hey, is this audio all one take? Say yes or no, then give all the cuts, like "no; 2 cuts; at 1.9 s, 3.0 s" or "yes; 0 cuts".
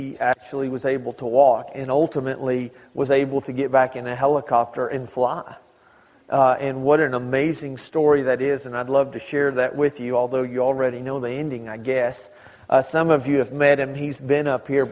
yes; 0 cuts